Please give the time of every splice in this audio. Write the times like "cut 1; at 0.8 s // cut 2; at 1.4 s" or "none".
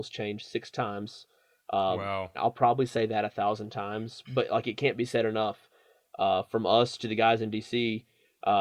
cut 1; at 2.3 s